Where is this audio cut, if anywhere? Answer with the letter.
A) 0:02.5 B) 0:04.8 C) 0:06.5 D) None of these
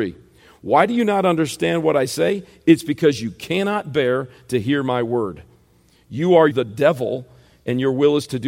C